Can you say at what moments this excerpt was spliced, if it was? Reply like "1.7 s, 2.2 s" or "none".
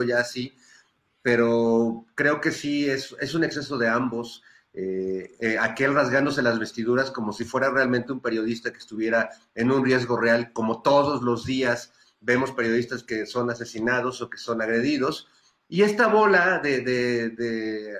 none

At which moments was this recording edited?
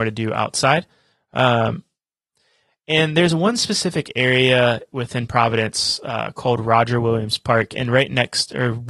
none

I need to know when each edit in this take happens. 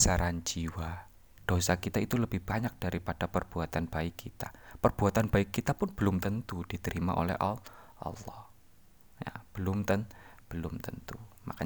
1.4 s

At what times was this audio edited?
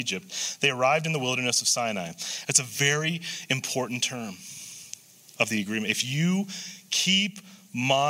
2.4 s

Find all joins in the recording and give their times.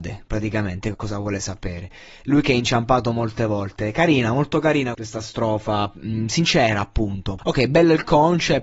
0.9 s, 4.9 s, 7.4 s

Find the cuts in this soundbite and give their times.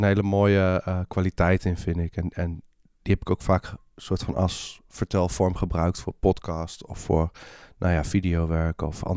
none

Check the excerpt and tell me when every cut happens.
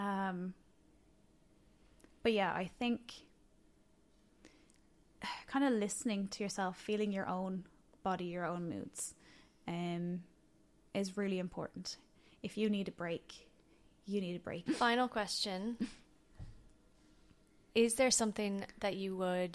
14.7 s

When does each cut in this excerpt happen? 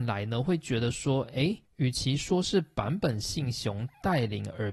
none

